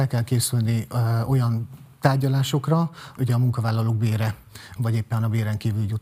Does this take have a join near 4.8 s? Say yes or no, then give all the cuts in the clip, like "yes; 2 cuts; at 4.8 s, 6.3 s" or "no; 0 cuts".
yes; 2 cuts; at 3.2 s, 4.8 s